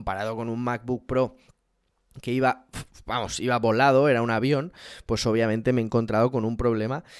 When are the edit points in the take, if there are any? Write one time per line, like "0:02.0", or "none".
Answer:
none